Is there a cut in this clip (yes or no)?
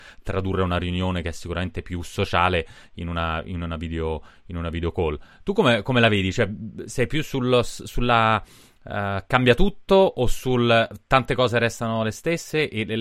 no